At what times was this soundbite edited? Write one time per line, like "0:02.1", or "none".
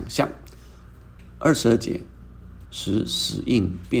0:01.2
0:02.6